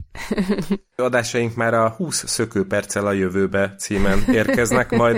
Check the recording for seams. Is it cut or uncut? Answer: cut